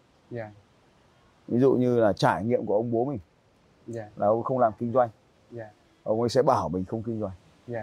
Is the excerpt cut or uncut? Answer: uncut